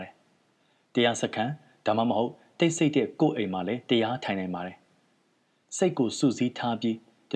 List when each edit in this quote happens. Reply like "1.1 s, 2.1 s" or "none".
none